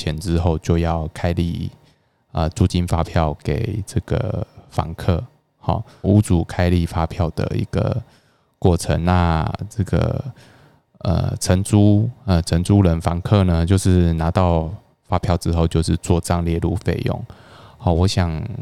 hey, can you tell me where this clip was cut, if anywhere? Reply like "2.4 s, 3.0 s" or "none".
6.0 s